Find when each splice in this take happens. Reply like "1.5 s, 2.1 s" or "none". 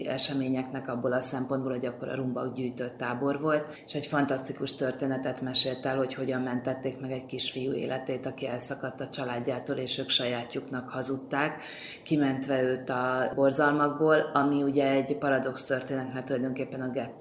none